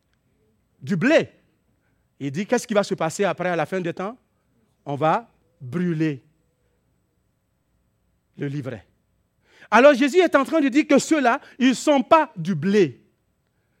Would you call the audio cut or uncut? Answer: uncut